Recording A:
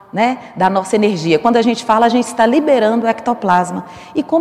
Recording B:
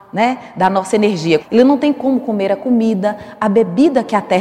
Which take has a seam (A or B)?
B